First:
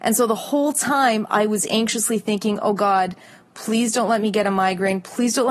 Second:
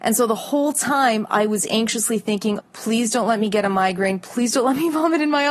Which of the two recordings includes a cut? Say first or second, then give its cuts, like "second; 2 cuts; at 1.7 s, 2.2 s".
second; 1 cut; at 2.6 s